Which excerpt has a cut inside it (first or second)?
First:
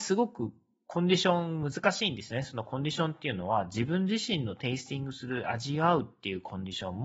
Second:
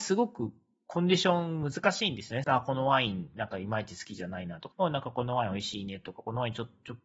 second